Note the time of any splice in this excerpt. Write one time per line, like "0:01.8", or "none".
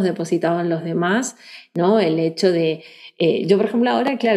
none